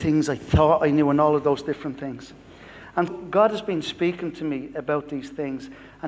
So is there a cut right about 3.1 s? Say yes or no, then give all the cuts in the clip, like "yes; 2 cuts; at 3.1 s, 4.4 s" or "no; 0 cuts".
yes; 1 cut; at 3.1 s